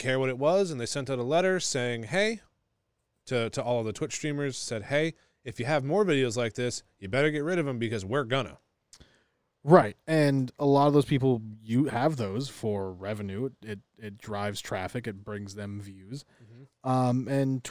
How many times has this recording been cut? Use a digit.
0